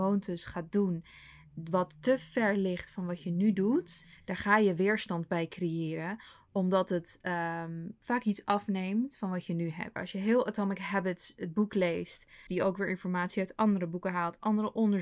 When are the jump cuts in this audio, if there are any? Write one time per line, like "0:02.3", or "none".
0:10.0
0:12.5